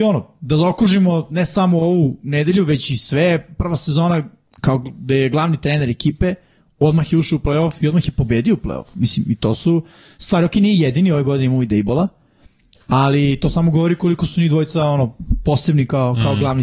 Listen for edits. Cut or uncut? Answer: uncut